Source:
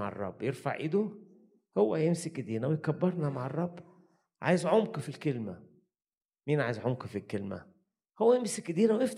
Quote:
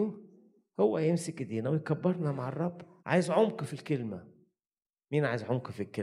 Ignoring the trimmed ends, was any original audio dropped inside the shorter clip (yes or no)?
yes